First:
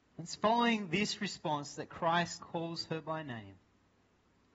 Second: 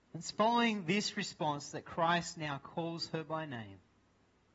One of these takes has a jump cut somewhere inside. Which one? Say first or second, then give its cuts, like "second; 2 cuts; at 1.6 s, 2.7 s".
first; 1 cut; at 2.4 s